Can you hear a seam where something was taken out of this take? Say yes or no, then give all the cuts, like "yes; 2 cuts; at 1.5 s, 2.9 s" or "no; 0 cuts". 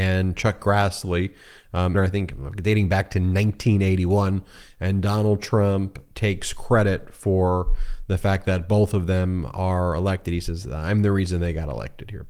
yes; 1 cut; at 1.9 s